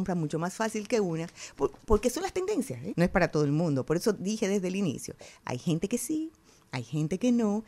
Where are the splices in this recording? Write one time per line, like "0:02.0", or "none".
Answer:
0:02.9

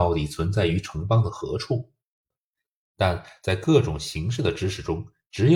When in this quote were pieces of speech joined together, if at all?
0:02.3

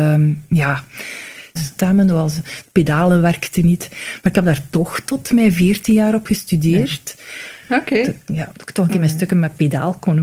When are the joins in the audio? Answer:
0:01.6
0:07.6

